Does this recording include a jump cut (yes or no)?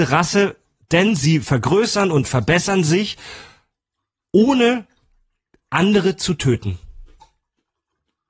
no